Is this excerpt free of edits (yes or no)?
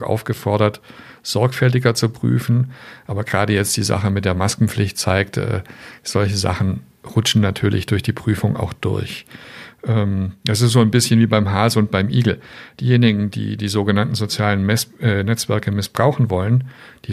yes